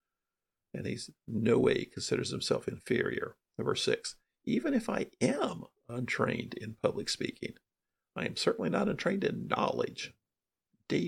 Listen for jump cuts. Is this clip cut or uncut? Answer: uncut